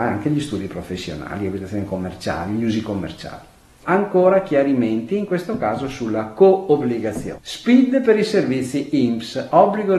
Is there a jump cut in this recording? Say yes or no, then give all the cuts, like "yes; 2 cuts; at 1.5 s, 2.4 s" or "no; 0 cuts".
yes; 2 cuts; at 3.8 s, 7.3 s